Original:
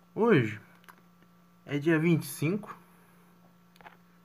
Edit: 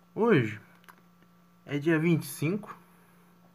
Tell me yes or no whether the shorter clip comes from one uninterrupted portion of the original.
yes